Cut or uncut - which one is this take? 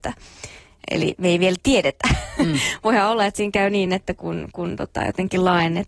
uncut